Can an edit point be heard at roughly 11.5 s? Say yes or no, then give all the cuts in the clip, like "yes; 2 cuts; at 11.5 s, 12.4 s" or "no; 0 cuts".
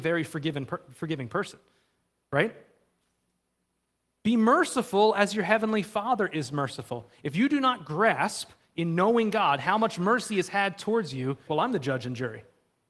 yes; 1 cut; at 11.5 s